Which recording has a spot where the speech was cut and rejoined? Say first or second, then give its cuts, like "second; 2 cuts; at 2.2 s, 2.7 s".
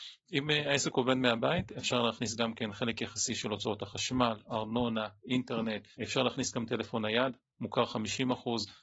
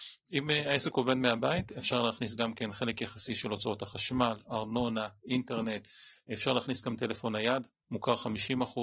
first; 1 cut; at 5.9 s